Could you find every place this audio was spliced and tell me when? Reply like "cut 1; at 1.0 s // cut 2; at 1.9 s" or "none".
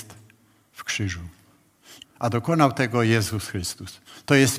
cut 1; at 2.0 s